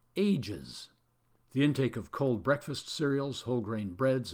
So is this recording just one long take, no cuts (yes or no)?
yes